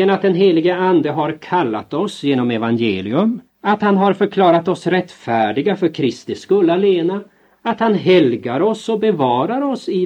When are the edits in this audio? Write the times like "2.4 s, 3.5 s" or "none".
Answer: 3.5 s